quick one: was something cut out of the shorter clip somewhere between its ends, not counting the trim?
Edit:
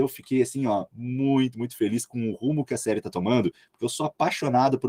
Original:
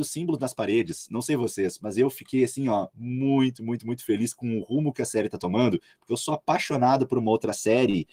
yes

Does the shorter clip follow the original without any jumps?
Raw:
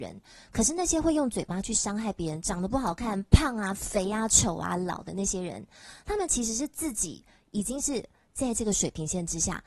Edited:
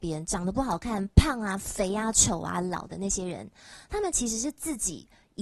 yes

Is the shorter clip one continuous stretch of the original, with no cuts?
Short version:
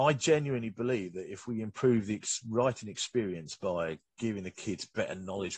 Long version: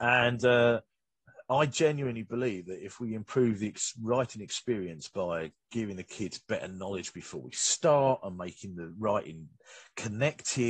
yes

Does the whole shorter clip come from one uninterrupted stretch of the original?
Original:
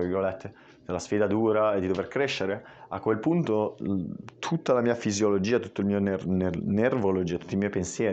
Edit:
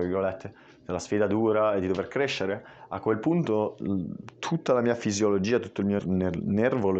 no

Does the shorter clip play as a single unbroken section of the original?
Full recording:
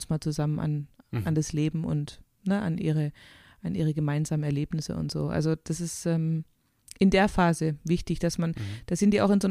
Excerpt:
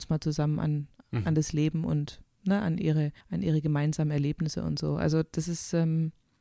no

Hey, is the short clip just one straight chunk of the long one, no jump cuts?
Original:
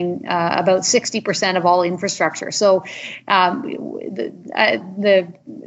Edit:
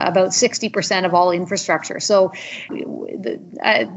no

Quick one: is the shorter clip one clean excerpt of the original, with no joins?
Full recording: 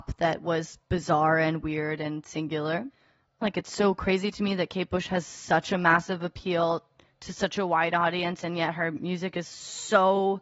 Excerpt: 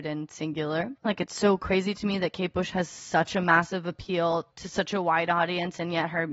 no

